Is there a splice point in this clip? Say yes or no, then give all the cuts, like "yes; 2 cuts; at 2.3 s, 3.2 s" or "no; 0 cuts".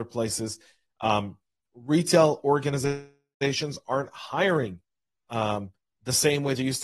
no; 0 cuts